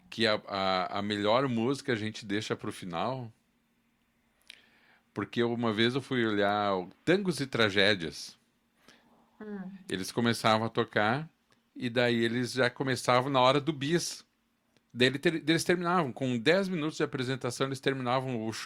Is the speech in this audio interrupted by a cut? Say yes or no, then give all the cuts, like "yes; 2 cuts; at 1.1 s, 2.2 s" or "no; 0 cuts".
no; 0 cuts